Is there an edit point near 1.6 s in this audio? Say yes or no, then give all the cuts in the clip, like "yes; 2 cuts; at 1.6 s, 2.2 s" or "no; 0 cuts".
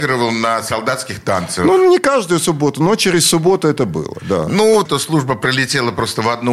no; 1 cut; at 4.9 s